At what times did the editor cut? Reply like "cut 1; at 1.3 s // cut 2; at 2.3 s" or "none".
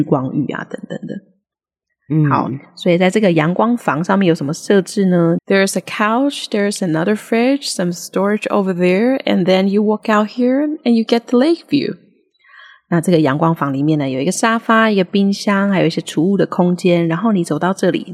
cut 1; at 5.4 s